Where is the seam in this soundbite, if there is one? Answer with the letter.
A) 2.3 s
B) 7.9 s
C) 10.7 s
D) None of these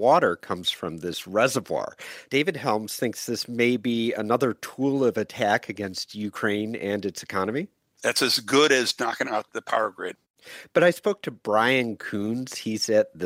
A